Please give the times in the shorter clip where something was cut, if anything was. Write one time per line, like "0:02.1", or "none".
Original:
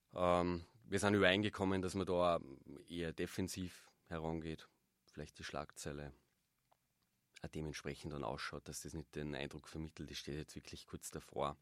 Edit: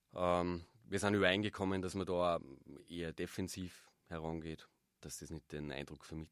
0:05.0